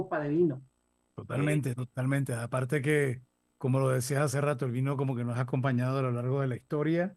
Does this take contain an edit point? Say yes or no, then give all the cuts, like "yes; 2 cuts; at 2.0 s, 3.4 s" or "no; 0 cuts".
no; 0 cuts